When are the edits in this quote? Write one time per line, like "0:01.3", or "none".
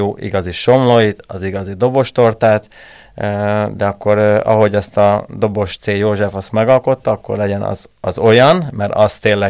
none